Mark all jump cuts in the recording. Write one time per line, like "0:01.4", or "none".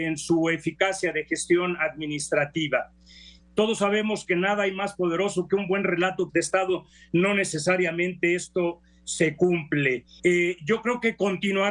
0:03.4
0:06.3
0:10.2